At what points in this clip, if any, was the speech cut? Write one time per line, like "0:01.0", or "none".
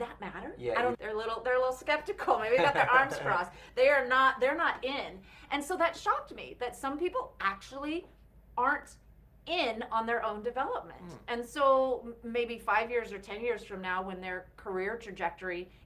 0:00.9